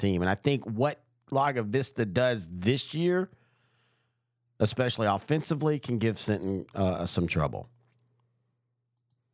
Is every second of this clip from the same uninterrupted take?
yes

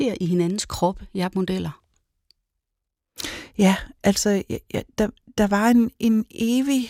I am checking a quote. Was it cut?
no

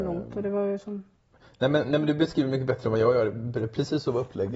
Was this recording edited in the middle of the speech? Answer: no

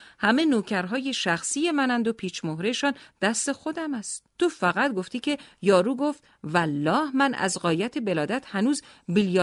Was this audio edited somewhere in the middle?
yes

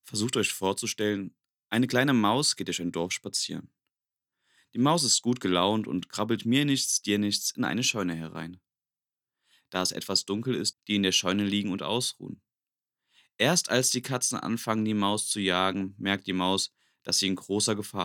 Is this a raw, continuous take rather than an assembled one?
no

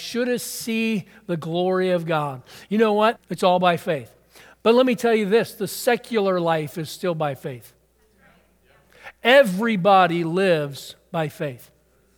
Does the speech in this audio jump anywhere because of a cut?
yes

